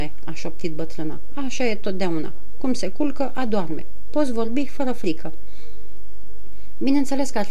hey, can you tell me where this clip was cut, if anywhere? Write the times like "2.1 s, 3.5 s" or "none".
none